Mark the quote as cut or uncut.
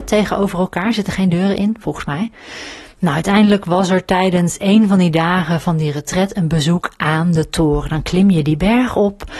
cut